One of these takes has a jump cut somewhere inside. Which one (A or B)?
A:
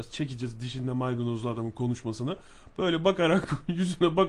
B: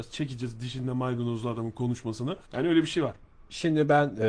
B